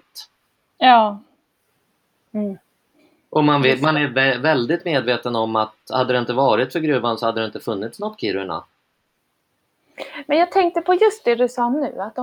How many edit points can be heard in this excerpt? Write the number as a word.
one